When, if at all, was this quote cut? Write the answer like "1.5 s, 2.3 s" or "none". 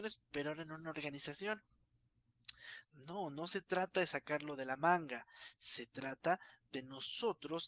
2.8 s